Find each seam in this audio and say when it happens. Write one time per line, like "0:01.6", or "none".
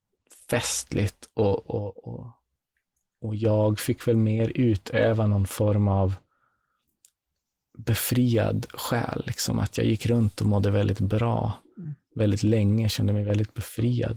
none